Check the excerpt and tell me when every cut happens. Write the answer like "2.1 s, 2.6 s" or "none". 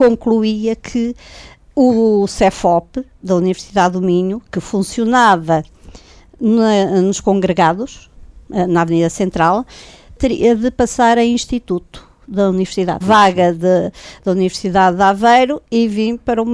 13.0 s